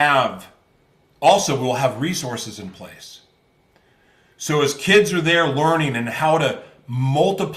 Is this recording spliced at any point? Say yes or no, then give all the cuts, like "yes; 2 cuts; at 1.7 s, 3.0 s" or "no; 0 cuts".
no; 0 cuts